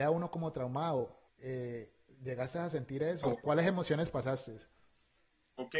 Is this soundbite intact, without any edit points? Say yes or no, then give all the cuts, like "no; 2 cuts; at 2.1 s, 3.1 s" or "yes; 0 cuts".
no; 2 cuts; at 1.3 s, 3.2 s